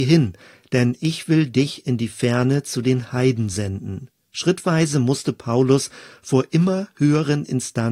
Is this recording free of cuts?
no; 1 cut; at 4.3 s

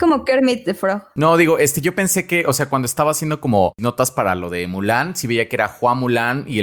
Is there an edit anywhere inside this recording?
no; 0 cuts

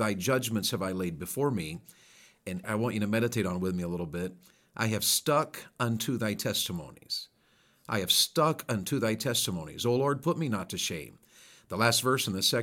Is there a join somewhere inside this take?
yes; 1 cut; at 2.6 s

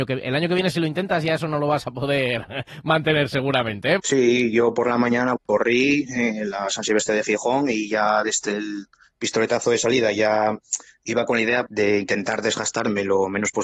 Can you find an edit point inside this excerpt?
yes; 3 cuts; at 4.0 s, 5.4 s, 11.7 s

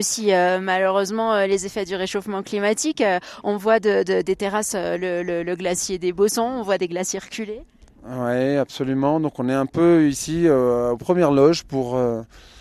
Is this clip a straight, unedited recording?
yes; 0 cuts

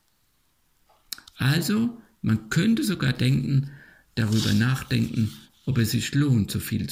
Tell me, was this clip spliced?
no; 0 cuts

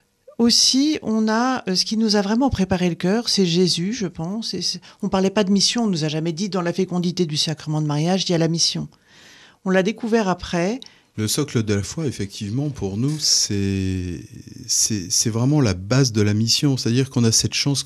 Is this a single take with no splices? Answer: no; 1 cut; at 11.1 s

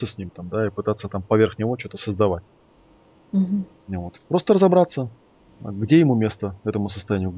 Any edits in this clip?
no; 0 cuts

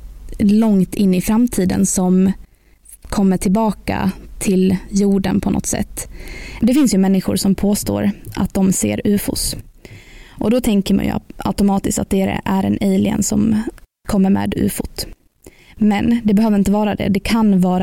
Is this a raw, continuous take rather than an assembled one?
yes; 0 cuts

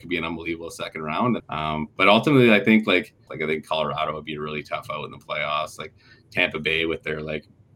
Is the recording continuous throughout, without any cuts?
no; 2 cuts; at 1.4 s, 3.3 s

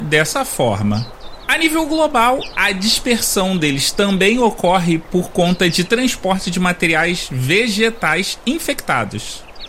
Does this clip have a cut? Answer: no; 0 cuts

